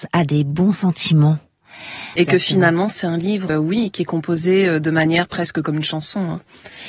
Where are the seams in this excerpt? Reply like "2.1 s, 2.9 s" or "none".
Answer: 2.2 s, 3.5 s